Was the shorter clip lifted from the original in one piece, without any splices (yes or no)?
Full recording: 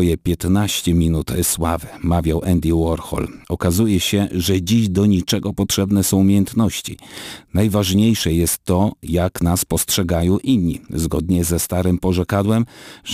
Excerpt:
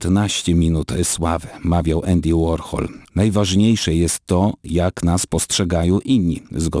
no